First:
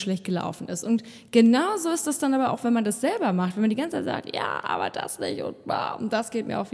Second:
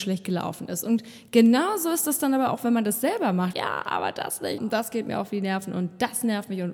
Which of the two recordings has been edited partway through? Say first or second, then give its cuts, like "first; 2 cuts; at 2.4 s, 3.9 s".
second; 2 cuts; at 3.5 s, 4.6 s